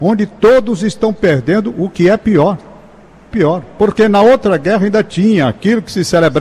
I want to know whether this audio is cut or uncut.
cut